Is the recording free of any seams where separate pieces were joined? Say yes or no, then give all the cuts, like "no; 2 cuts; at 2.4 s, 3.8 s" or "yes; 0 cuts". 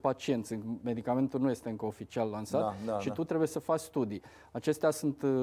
yes; 0 cuts